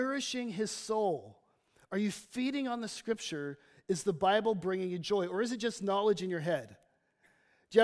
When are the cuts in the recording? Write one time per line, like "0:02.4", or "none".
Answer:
none